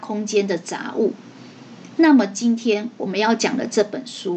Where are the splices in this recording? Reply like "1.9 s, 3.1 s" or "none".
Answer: 2.0 s

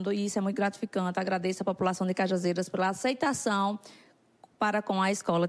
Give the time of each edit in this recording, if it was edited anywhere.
none

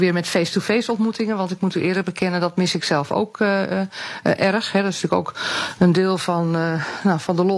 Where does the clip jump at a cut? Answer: none

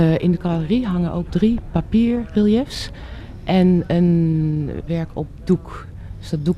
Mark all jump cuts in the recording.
1.3 s, 4.9 s

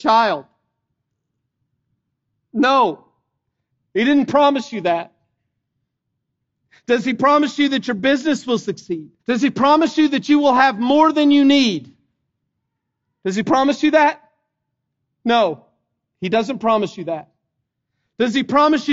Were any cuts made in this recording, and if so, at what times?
9.2 s

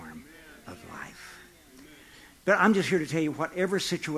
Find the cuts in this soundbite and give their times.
2.3 s

